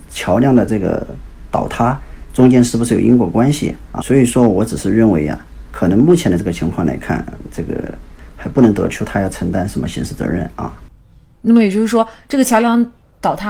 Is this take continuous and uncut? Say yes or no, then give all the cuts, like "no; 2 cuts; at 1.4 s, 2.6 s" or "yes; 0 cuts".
no; 1 cut; at 4.0 s